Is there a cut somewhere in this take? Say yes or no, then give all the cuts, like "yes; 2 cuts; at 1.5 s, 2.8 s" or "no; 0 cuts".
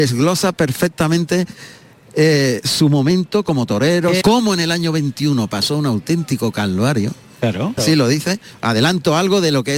yes; 2 cuts; at 4.2 s, 7.8 s